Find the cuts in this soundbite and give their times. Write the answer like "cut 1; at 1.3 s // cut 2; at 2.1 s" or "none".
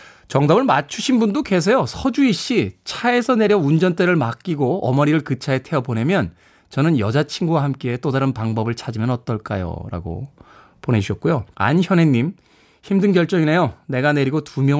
cut 1; at 11.5 s